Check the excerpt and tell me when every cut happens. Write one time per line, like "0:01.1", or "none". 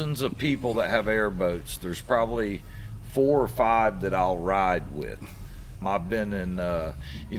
0:05.8